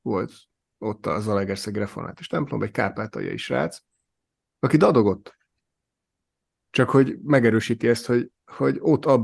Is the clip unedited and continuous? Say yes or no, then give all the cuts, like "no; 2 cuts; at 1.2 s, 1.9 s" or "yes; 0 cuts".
no; 1 cut; at 6.7 s